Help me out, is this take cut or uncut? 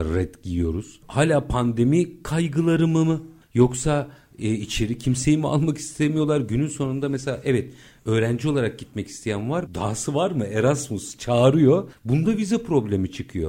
cut